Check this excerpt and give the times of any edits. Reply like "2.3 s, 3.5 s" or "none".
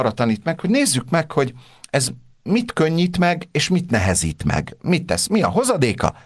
none